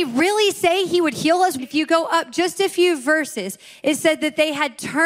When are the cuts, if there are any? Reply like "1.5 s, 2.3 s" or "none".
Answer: 1.6 s